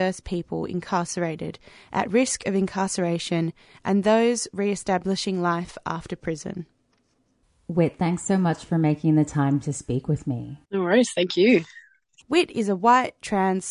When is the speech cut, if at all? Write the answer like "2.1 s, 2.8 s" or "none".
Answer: 10.6 s, 12.2 s